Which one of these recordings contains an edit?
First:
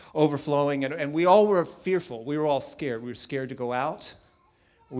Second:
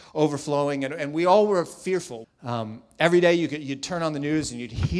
second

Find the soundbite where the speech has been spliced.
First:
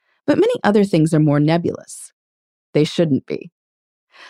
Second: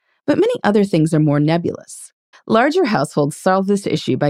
second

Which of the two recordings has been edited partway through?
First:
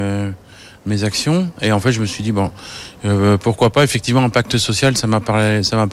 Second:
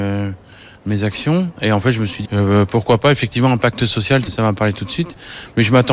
second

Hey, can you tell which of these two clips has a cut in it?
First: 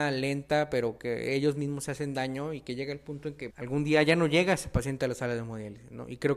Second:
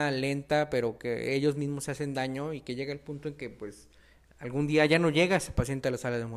first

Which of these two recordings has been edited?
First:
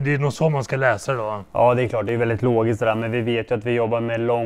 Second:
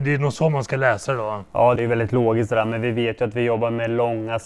second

